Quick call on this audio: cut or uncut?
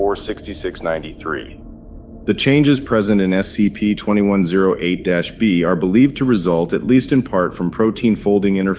uncut